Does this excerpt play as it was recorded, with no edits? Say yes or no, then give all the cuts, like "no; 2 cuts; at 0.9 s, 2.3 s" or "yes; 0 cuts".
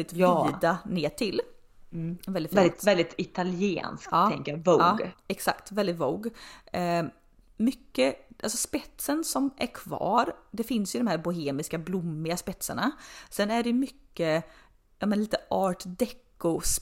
yes; 0 cuts